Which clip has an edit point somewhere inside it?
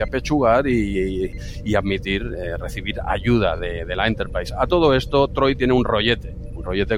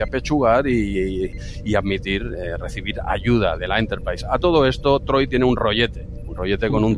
second; 1 cut; at 3.6 s

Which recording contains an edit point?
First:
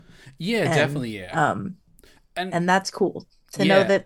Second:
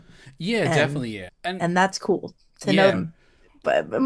second; 2 cuts; at 1.3 s, 2.9 s

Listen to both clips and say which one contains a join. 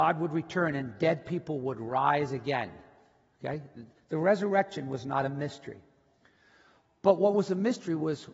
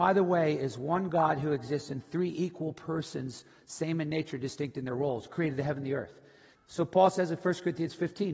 second; 1 cut; at 6.6 s

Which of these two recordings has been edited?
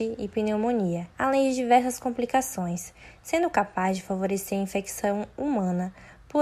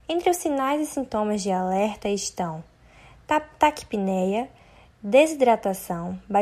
first; 1 cut; at 1.1 s

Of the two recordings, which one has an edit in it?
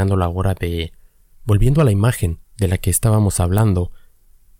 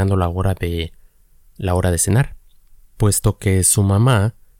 first; 2 cuts; at 1.3 s, 2.5 s

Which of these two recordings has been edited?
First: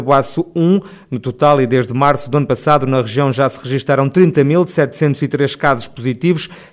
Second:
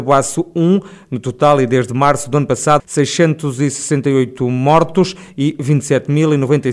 second; 1 cut; at 2.8 s

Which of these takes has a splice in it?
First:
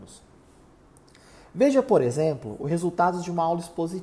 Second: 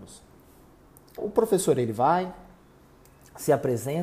second; 1 cut; at 1.2 s

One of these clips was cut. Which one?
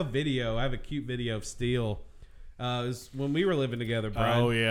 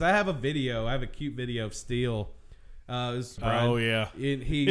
second; 1 cut; at 3.4 s

